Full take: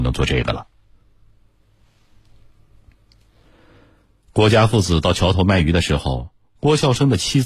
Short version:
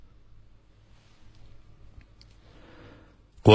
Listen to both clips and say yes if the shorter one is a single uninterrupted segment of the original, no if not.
yes